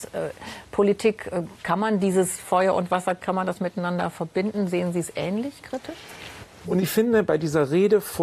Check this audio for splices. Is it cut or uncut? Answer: cut